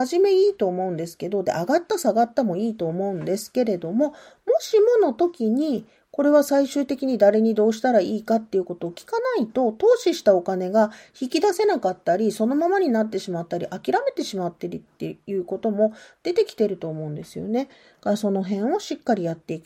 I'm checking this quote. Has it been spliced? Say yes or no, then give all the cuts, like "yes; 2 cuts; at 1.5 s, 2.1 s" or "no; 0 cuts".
no; 0 cuts